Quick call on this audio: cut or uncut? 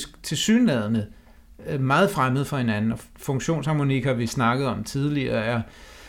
uncut